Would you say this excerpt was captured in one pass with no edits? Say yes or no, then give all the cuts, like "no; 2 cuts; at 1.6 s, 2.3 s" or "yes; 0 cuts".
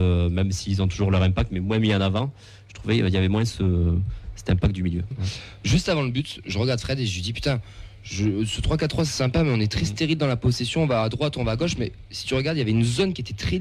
no; 1 cut; at 5.1 s